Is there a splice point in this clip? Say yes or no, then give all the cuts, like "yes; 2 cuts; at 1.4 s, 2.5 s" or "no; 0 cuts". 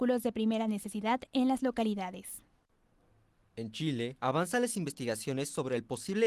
no; 0 cuts